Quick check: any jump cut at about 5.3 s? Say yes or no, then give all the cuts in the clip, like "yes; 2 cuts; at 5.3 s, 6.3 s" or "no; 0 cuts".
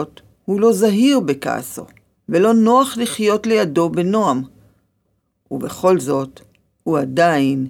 no; 1 cut; at 2.2 s